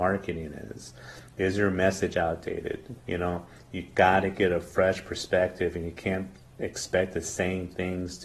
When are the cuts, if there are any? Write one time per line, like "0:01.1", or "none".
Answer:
0:03.0